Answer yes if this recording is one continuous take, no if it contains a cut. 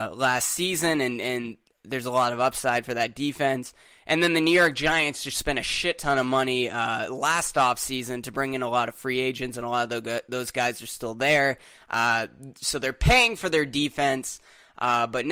yes